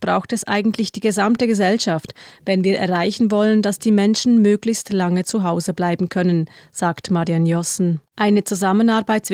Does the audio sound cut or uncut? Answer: cut